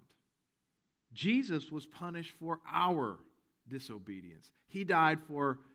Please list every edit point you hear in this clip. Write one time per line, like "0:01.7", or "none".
0:01.0